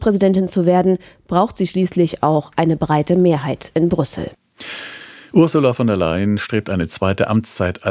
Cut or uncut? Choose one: uncut